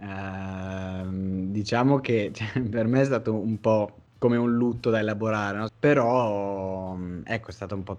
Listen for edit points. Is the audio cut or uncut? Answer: cut